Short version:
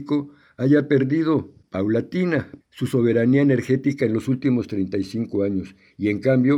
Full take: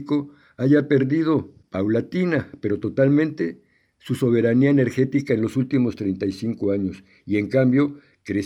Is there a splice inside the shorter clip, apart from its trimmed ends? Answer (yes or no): yes